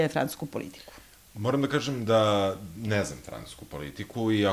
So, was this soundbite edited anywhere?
no; 0 cuts

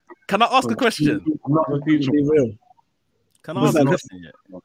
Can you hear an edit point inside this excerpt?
no; 0 cuts

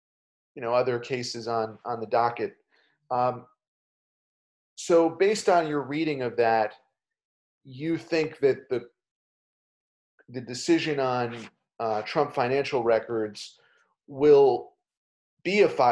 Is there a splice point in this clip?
no; 0 cuts

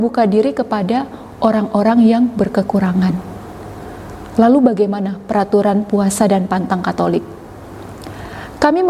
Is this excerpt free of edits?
yes; 0 cuts

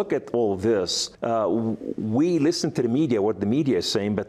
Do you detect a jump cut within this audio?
yes; 1 cut; at 1.1 s

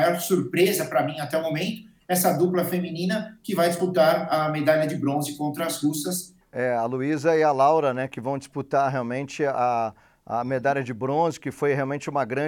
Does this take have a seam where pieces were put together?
yes; 1 cut; at 6.4 s

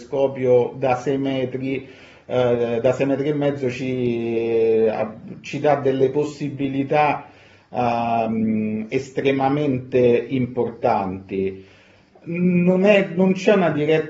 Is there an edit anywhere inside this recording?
no; 0 cuts

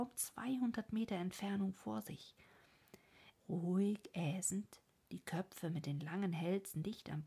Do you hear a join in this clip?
yes; 1 cut; at 3.3 s

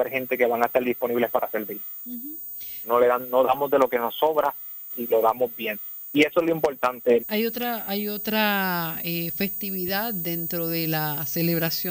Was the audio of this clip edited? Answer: yes; 3 cuts; at 2.8 s, 4.9 s, 7.2 s

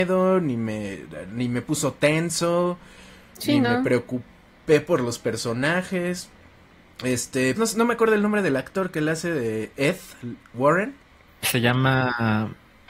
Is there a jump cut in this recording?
yes; 1 cut; at 7.6 s

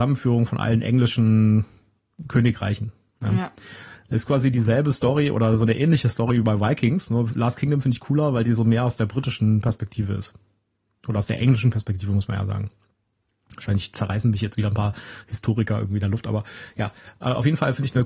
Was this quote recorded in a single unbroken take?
yes; 0 cuts

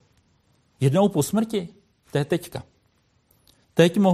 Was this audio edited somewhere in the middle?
yes; 1 cut; at 1.9 s

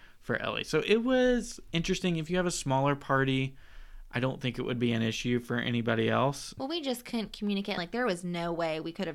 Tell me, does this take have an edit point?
yes; 2 cuts; at 6.6 s, 7.8 s

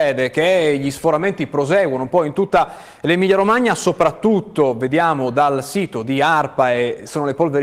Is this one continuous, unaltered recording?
yes; 0 cuts

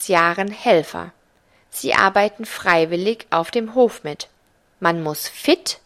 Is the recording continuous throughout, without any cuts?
no; 1 cut; at 4.8 s

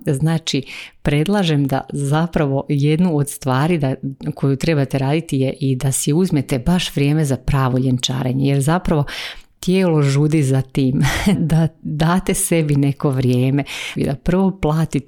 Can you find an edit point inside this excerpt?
yes; 2 cuts; at 11.4 s, 14.0 s

